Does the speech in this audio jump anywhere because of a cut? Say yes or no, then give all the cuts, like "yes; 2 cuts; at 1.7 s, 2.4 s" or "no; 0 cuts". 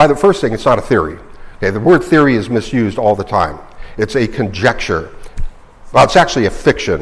no; 0 cuts